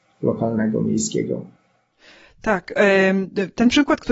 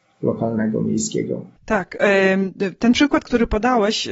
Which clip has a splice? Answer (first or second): second